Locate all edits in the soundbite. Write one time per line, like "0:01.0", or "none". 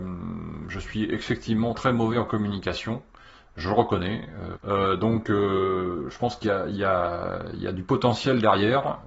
0:01.7
0:04.5